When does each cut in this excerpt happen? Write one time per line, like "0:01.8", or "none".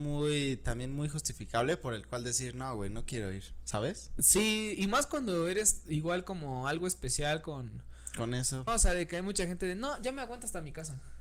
0:08.7